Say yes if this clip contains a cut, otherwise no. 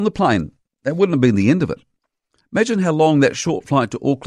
no